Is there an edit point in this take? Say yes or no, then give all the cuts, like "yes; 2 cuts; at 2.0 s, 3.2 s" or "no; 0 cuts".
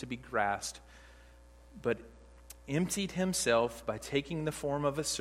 no; 0 cuts